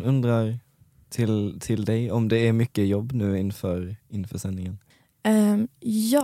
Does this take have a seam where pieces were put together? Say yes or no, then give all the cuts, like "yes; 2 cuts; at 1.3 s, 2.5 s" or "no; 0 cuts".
no; 0 cuts